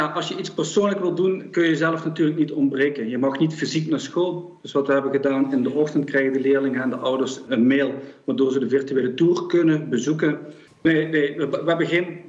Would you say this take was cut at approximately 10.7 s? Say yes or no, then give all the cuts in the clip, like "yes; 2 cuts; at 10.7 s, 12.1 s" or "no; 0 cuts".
yes; 2 cuts; at 7.5 s, 10.7 s